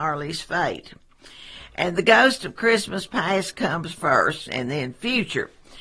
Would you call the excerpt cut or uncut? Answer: cut